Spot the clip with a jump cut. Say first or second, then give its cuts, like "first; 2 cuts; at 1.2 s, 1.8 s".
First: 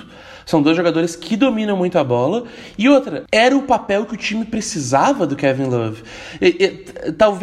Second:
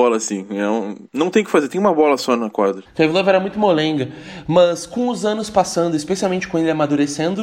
second; 1 cut; at 2.8 s